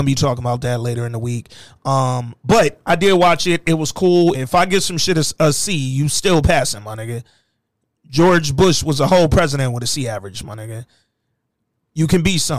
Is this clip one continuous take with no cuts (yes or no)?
no